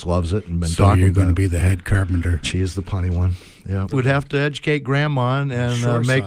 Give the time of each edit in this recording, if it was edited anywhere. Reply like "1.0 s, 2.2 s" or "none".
2.4 s, 3.9 s